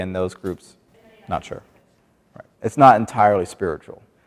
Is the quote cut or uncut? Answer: cut